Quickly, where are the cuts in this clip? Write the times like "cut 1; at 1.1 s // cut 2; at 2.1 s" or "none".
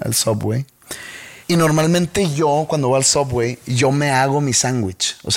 cut 1; at 1.4 s